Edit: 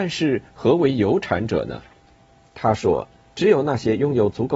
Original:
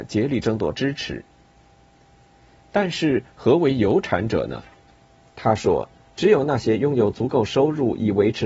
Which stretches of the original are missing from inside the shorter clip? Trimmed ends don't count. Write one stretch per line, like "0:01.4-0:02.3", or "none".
none